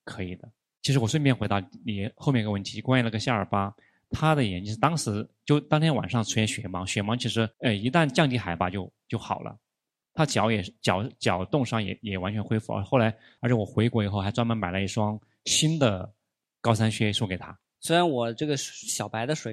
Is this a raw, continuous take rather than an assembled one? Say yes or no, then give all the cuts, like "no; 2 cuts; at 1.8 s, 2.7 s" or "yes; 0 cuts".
no; 3 cuts; at 7.5 s, 13.4 s, 17.8 s